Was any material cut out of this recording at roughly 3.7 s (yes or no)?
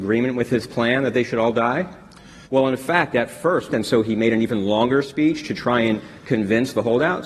yes